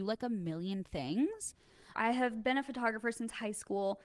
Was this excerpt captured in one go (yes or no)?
no